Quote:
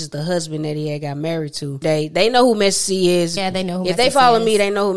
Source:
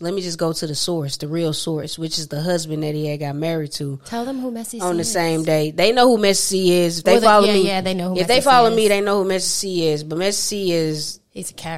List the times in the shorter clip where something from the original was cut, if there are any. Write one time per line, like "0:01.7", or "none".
0:01.8
0:03.4